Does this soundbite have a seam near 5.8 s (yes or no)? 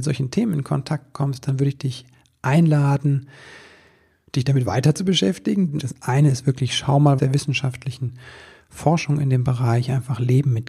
yes